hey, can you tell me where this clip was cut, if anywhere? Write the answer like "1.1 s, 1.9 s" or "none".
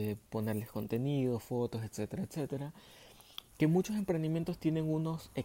3.5 s